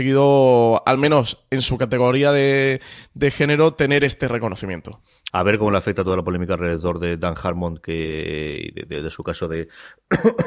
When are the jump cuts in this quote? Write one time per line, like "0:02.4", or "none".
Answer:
0:05.3